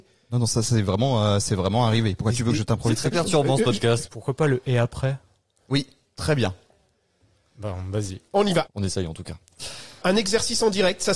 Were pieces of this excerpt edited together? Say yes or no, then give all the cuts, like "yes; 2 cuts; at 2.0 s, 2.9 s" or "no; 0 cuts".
yes; 3 cuts; at 4.1 s, 8.7 s, 10.0 s